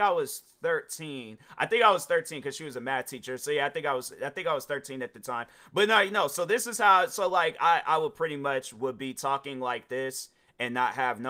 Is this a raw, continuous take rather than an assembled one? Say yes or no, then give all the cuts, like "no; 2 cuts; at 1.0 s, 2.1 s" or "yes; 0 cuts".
yes; 0 cuts